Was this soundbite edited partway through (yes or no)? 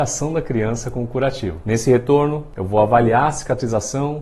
yes